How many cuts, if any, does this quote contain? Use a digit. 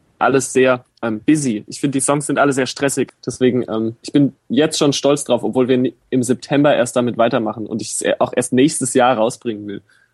1